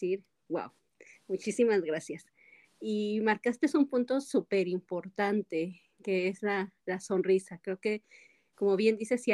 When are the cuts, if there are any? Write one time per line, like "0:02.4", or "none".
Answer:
none